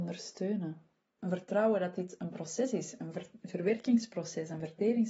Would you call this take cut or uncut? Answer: cut